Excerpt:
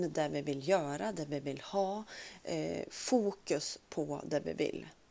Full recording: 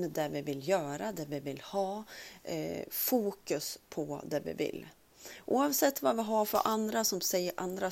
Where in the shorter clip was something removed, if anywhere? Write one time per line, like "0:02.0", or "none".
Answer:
none

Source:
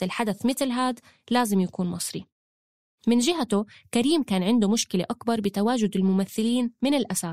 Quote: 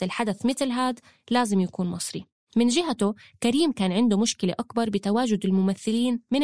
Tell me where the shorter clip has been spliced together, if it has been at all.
0:02.5

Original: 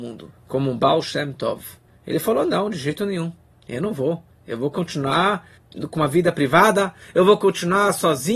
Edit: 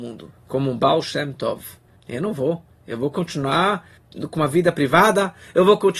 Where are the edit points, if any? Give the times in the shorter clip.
0:02.0

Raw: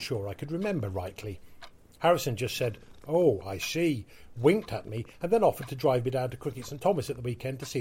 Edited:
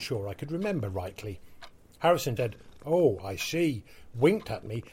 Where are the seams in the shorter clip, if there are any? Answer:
0:02.4

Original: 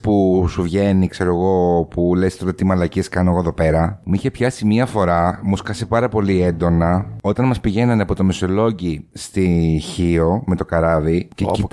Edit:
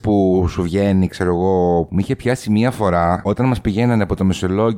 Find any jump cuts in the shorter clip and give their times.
0:01.9
0:03.2

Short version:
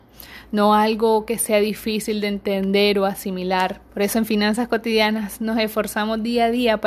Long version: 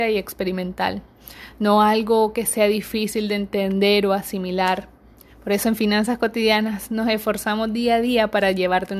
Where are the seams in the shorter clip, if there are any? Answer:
0:03.9

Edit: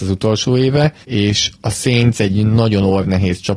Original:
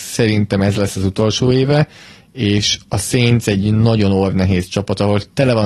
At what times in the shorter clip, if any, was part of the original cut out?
0:01.0

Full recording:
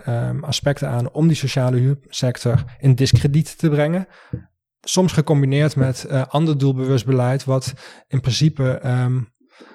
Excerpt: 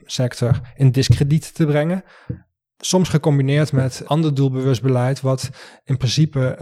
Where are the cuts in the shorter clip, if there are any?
0:04.0

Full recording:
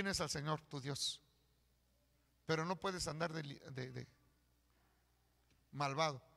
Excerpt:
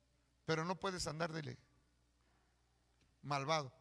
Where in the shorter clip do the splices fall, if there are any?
0:01.4

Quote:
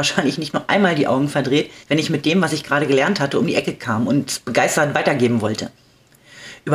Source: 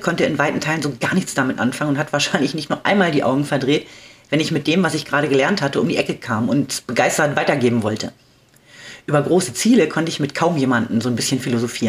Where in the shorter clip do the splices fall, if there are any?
0:01.8

